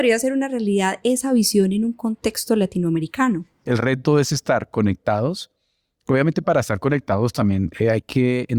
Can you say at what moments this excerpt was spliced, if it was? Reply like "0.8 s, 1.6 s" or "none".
none